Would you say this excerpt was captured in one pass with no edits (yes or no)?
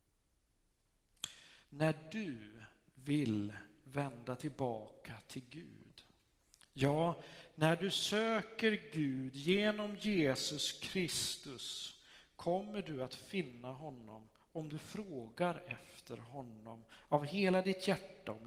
no